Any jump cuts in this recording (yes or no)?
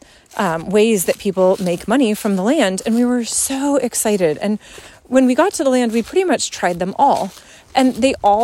no